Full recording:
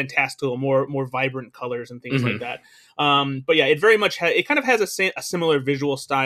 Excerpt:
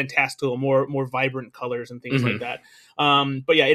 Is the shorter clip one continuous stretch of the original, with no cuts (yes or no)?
yes